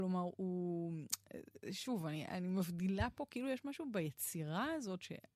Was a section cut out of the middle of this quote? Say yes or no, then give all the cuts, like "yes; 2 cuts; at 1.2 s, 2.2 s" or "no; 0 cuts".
no; 0 cuts